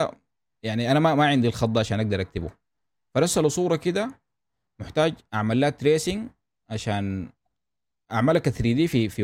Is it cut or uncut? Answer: uncut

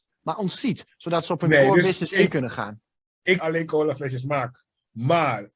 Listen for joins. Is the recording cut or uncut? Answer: cut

